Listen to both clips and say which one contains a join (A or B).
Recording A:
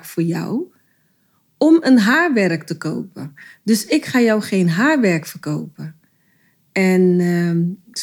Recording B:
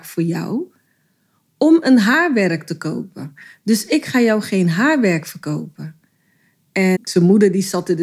B